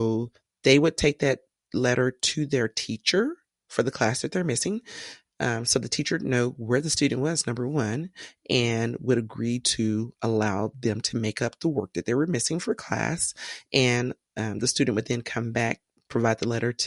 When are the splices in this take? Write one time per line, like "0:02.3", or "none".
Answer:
none